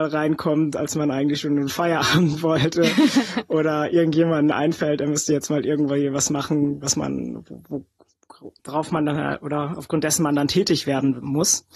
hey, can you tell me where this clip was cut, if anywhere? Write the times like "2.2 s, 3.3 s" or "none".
8.6 s